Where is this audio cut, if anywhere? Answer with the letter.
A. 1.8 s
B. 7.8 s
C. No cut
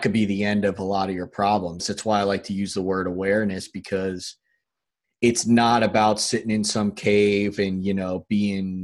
A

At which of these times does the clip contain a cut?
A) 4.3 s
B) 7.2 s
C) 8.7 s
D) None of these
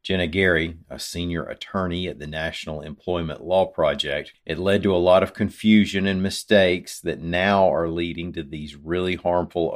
A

